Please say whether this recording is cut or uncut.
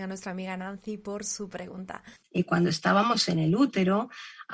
cut